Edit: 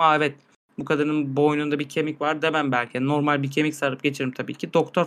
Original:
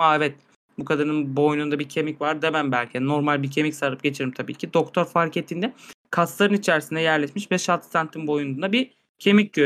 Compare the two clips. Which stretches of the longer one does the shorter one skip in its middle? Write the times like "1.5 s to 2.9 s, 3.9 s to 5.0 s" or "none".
none